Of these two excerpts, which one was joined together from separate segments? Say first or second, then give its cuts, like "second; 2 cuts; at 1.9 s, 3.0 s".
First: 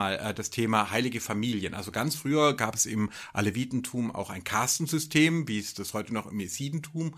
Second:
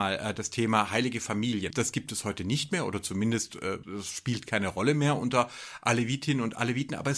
second; 2 cuts; at 1.7 s, 3.8 s